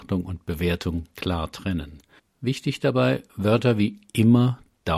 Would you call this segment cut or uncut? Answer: cut